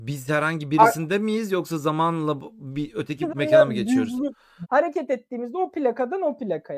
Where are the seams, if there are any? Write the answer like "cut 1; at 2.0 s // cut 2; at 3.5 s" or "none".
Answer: cut 1; at 3.3 s // cut 2; at 4.6 s